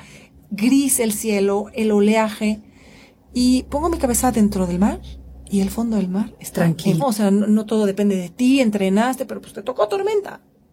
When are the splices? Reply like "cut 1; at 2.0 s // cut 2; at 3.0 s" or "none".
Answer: cut 1; at 7.0 s